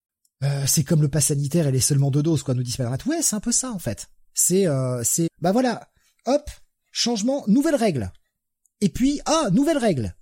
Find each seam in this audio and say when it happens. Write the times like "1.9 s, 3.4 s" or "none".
5.3 s